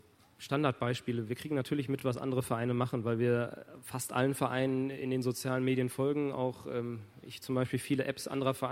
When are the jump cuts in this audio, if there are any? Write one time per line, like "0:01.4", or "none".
none